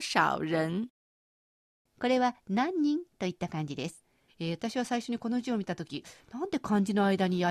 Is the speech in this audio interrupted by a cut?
yes; 1 cut; at 4.3 s

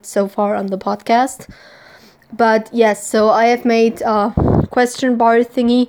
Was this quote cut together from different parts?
no; 0 cuts

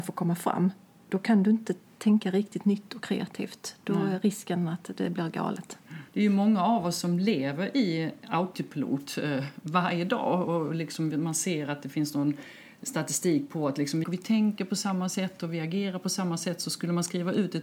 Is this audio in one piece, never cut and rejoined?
no; 2 cuts; at 6.1 s, 14.0 s

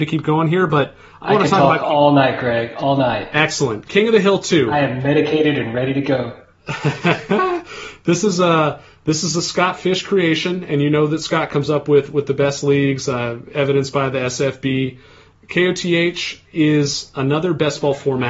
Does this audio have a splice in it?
no; 0 cuts

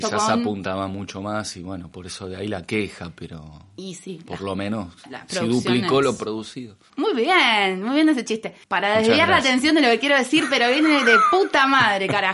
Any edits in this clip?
yes; 2 cuts; at 6.9 s, 8.6 s

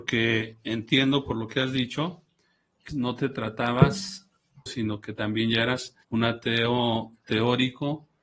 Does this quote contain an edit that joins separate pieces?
yes; 3 cuts; at 2.9 s, 4.7 s, 6.0 s

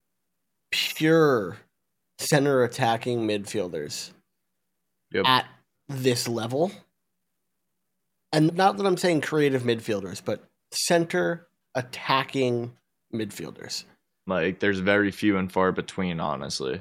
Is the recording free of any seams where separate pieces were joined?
no; 2 cuts; at 8.5 s, 14.3 s

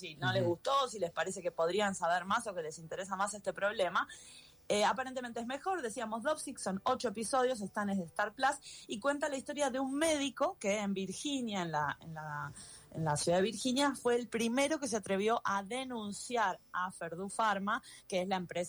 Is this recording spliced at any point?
no; 0 cuts

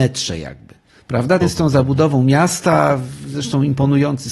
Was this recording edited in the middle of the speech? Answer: yes; 1 cut; at 1.4 s

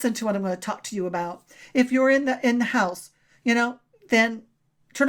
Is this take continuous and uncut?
yes; 0 cuts

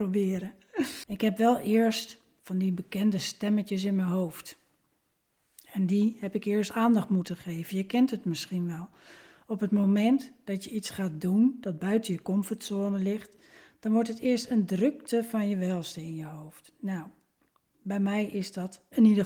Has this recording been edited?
yes; 1 cut; at 1.0 s

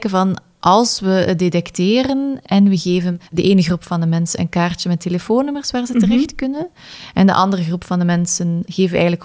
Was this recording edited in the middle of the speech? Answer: yes; 1 cut; at 3.3 s

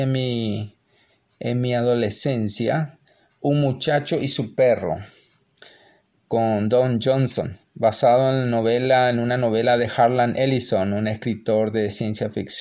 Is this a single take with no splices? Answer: yes; 0 cuts

